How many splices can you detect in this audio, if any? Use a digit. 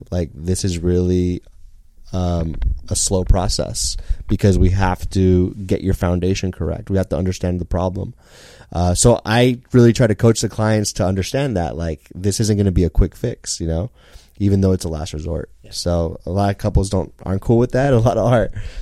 0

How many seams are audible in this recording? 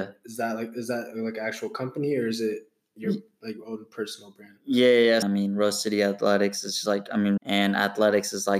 2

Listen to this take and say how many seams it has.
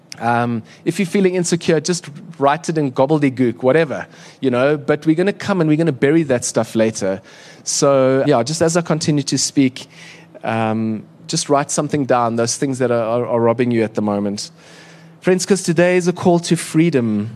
1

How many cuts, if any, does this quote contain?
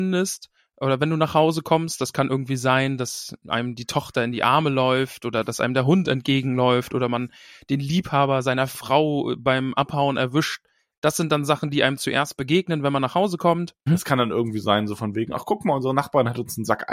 1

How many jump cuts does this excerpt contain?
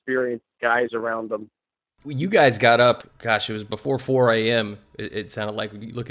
0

